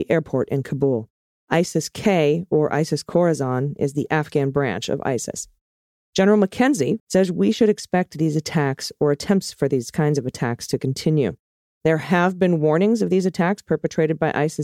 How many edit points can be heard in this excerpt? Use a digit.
1